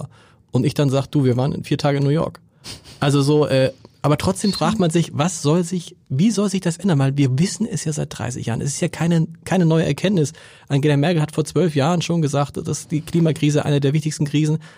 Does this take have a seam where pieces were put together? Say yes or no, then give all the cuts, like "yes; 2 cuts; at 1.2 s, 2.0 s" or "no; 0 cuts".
no; 0 cuts